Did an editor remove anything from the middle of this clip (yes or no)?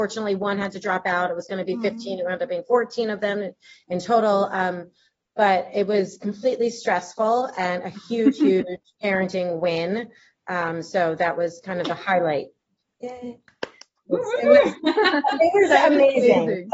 no